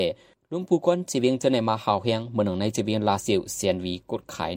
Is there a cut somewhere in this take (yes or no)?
no